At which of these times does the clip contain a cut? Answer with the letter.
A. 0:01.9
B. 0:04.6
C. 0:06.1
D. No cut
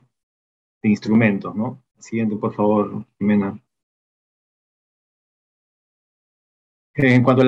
A